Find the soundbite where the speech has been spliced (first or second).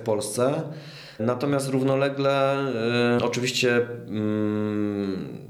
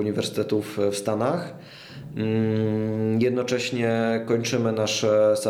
first